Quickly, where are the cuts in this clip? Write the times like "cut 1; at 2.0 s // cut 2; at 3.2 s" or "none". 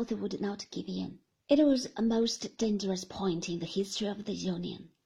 cut 1; at 1.3 s